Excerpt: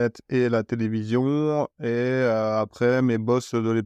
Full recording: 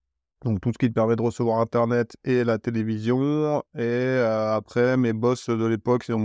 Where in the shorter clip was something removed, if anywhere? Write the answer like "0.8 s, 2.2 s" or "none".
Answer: none